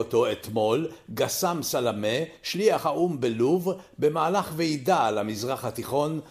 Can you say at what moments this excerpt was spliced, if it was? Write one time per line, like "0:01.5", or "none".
none